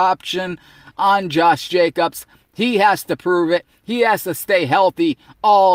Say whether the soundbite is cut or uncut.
uncut